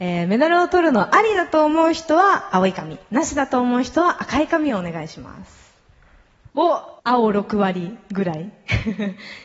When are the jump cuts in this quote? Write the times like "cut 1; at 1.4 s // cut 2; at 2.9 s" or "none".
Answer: cut 1; at 7.0 s